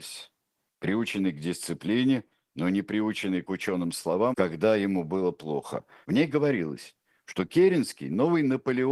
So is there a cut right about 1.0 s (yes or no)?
no